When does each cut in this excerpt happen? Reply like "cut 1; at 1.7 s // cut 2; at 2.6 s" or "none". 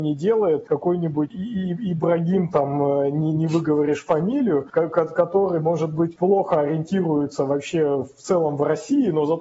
none